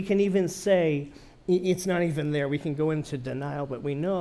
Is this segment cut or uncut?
cut